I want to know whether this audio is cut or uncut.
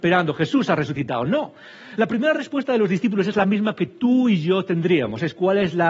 uncut